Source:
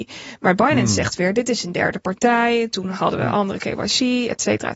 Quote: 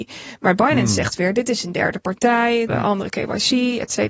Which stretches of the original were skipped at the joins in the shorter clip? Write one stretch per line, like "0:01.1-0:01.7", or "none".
0:02.7-0:03.2